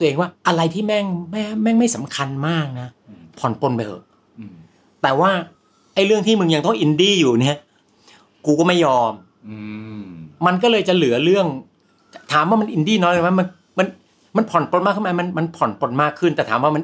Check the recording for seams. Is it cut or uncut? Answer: uncut